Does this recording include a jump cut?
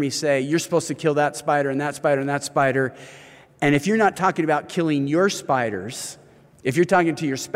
no; 0 cuts

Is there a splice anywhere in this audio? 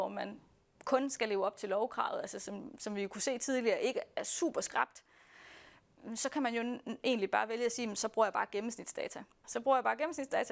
yes; 1 cut; at 9.4 s

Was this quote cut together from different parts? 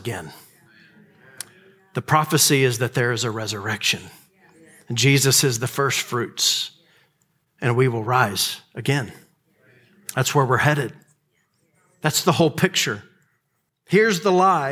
yes; 1 cut; at 13.7 s

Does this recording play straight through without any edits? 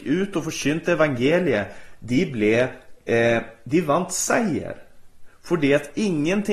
yes; 0 cuts

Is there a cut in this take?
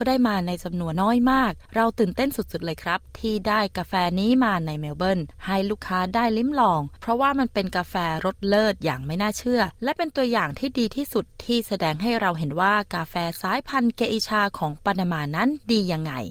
yes; 1 cut; at 0.9 s

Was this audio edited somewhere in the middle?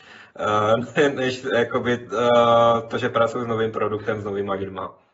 no; 0 cuts

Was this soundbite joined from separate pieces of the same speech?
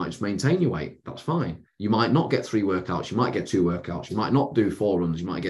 no; 0 cuts

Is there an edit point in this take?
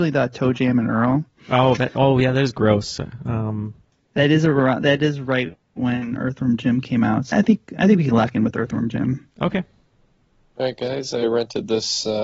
yes; 1 cut; at 7.3 s

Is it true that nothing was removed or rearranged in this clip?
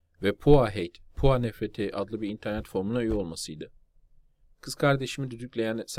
no; 1 cut; at 4.4 s

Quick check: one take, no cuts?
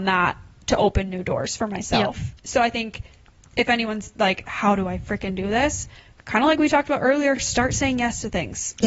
yes; 0 cuts

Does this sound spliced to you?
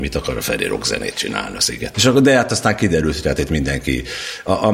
yes; 1 cut; at 1.9 s

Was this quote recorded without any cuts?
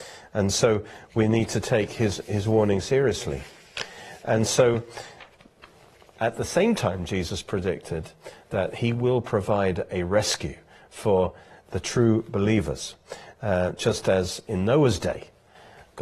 yes; 0 cuts

